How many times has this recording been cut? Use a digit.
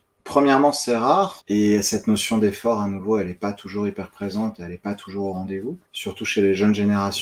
2